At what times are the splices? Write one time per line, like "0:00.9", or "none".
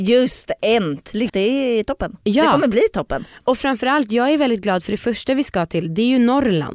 0:01.3